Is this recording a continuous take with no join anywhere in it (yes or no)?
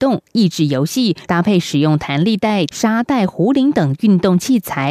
no